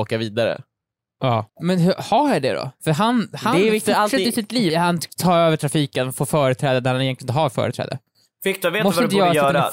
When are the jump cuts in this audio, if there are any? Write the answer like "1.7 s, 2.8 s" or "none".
1.5 s, 4.7 s